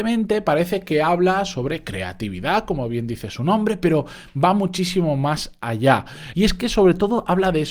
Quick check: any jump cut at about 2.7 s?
no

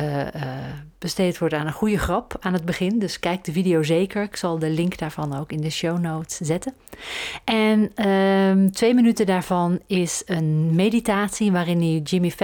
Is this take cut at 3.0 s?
no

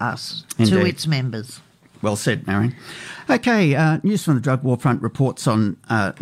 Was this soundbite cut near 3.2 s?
no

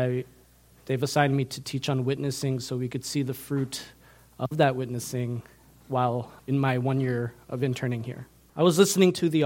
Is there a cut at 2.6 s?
no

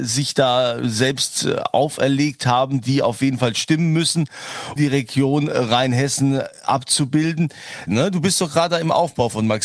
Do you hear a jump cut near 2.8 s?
no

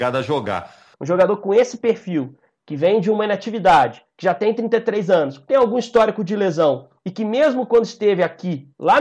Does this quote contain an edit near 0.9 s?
yes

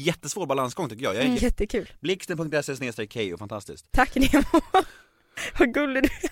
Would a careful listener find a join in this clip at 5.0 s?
no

